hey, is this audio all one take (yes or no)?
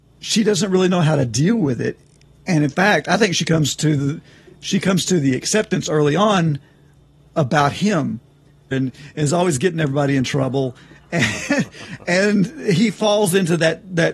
no